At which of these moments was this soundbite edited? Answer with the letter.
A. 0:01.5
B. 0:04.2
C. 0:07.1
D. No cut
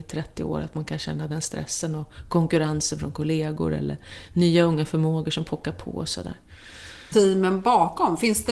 C